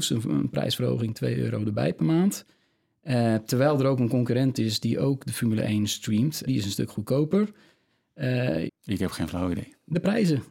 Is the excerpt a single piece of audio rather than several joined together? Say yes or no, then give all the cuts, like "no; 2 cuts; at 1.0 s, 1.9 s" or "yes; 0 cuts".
no; 2 cuts; at 6.5 s, 8.7 s